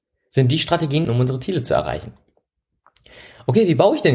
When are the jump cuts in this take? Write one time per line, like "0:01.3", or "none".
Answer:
0:01.0